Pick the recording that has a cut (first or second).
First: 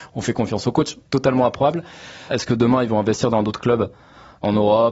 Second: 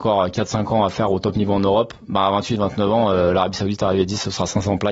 first